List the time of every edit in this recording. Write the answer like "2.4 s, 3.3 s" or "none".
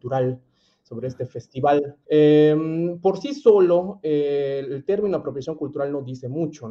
2.0 s